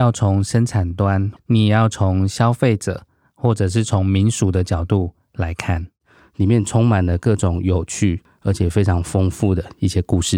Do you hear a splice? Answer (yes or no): yes